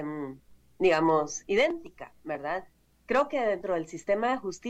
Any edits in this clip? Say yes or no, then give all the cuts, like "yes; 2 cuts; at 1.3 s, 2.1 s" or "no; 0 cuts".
no; 0 cuts